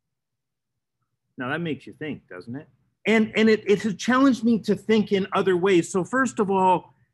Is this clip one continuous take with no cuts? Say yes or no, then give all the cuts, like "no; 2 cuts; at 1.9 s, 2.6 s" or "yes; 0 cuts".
no; 1 cut; at 3.0 s